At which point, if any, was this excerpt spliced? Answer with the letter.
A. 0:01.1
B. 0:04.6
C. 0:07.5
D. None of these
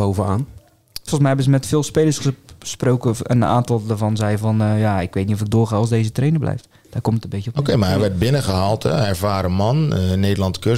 A